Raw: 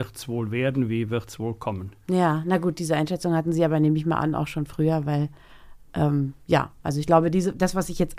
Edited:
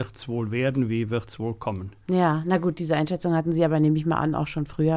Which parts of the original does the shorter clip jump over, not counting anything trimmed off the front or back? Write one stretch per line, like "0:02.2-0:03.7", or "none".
none